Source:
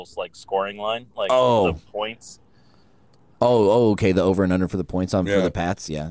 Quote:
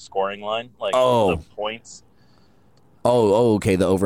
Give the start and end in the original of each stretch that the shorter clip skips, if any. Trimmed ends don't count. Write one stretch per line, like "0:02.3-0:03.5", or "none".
none